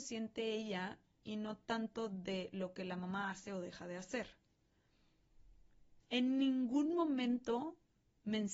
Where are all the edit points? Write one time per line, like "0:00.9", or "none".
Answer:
0:06.0